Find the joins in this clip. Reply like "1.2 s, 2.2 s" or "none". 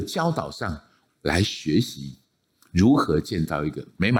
1.1 s